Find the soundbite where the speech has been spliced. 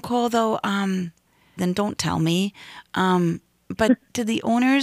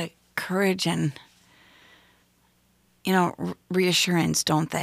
first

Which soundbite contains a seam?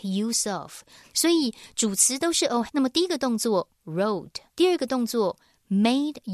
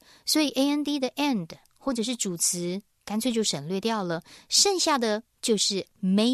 first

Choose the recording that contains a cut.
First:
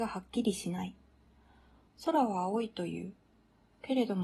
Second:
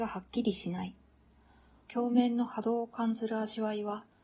second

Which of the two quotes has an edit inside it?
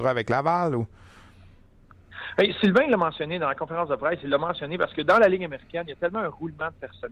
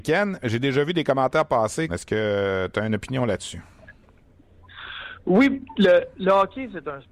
second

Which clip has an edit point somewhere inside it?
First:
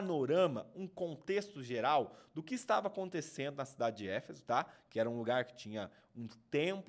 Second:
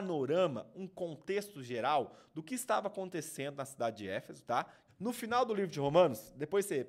second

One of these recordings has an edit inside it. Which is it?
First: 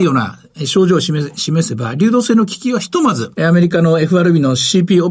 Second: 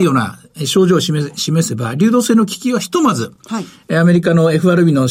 first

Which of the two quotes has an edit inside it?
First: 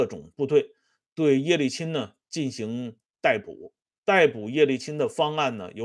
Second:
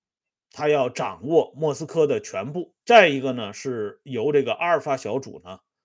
second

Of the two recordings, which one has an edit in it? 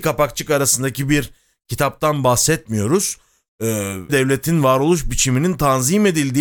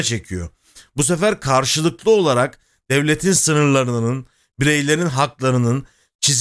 first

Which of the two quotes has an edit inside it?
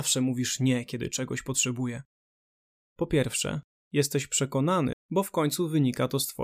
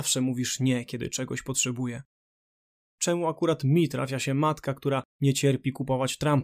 first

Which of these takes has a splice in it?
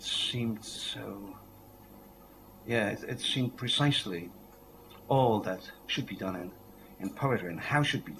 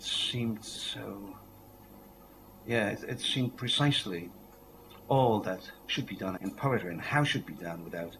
second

